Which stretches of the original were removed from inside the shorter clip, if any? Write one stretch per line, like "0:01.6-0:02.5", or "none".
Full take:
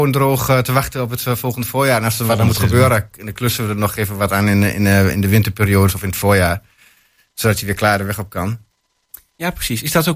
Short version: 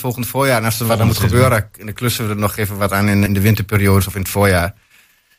0:04.7-0:05.1